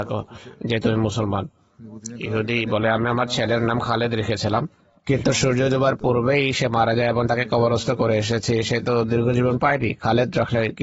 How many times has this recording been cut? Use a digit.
0